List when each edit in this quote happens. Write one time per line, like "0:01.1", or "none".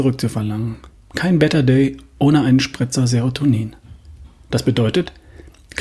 0:00.9